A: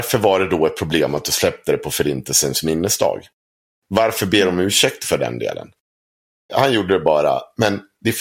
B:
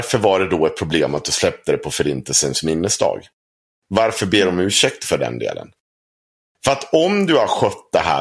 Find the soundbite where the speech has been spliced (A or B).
A